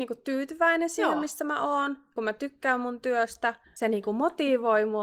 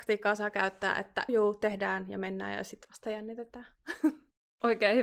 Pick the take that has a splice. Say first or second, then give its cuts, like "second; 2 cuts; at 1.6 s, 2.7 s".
second; 1 cut; at 1.3 s